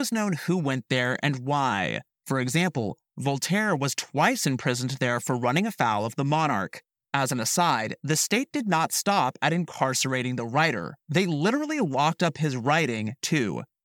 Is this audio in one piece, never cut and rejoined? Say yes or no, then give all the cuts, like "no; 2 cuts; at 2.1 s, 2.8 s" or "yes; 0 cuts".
yes; 0 cuts